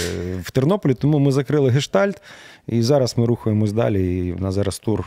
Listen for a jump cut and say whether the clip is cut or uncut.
uncut